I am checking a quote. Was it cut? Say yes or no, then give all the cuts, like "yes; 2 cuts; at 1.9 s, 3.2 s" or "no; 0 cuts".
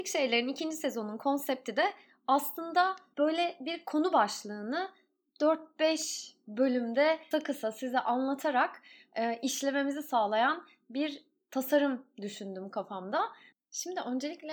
yes; 2 cuts; at 7.3 s, 13.5 s